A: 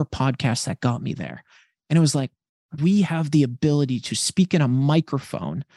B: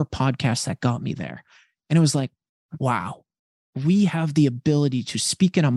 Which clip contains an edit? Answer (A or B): A